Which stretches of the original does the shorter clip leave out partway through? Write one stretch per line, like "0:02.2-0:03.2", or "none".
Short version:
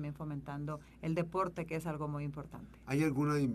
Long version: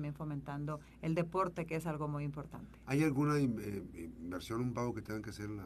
none